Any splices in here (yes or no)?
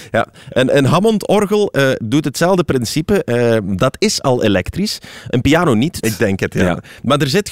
yes